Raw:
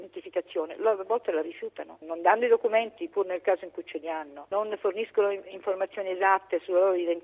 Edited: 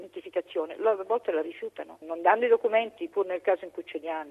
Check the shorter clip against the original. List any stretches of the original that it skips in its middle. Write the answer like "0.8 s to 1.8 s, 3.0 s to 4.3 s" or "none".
none